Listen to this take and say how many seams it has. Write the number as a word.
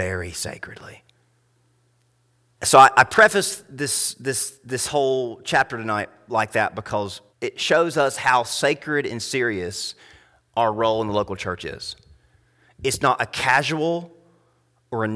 two